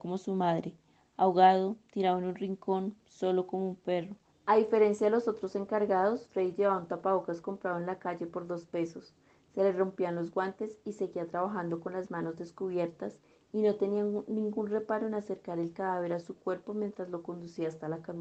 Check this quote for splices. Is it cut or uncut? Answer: cut